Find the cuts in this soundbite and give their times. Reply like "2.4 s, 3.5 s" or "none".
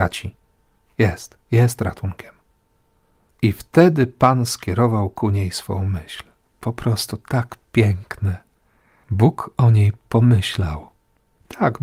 none